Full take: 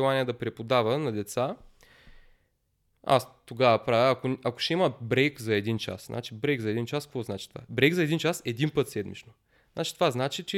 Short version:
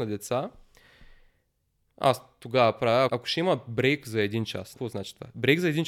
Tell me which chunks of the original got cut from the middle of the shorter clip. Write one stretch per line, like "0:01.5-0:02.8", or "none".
0:04.1-0:04.4
0:06.1-0:07.1